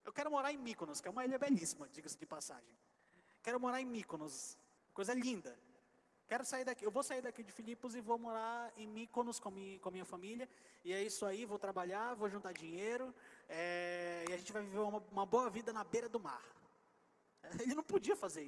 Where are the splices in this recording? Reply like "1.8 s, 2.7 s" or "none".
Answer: 4.8 s